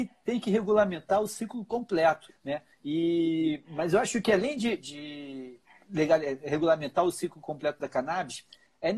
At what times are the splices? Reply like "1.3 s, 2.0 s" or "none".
2.3 s, 4.8 s